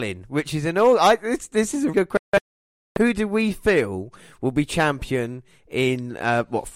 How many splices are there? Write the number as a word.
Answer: one